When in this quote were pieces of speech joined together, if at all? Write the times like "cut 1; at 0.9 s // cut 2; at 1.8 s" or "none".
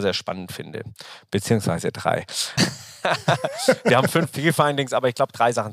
cut 1; at 2.6 s